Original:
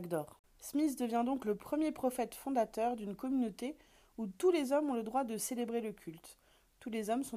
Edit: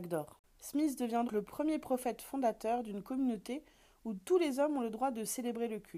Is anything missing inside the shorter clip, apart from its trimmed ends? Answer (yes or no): yes